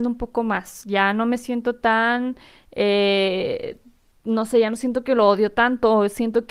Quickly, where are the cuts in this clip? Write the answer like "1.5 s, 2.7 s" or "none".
none

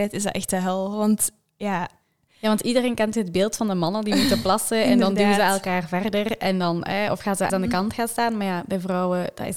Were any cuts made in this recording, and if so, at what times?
7.5 s

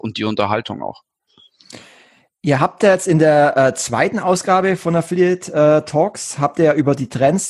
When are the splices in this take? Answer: none

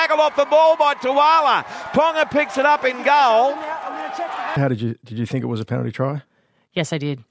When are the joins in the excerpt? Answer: 4.6 s

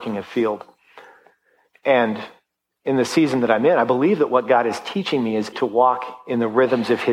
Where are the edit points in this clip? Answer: 5.5 s

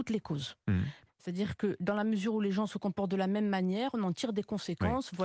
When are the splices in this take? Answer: 1.1 s

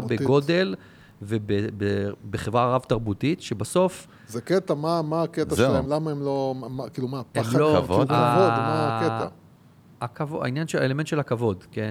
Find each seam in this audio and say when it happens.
5.8 s

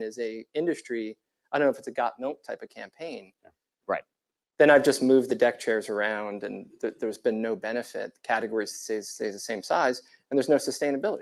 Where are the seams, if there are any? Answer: 3.8 s

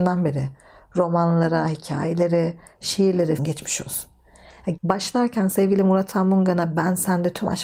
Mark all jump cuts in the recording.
3.4 s, 4.8 s

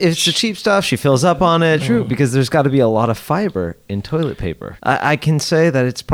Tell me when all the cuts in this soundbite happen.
1.8 s, 4.8 s

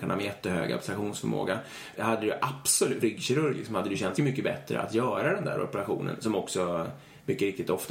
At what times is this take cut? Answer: 1.9 s, 3.0 s, 4.2 s

